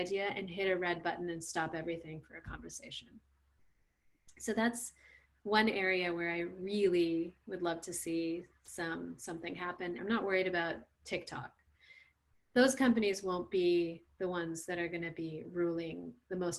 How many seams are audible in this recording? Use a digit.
1